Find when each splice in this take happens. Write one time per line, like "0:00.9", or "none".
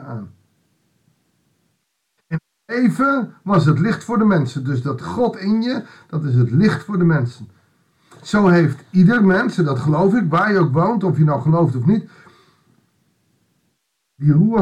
none